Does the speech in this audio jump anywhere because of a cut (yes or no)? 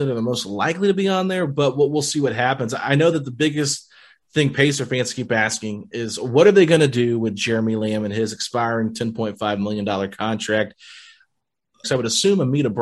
yes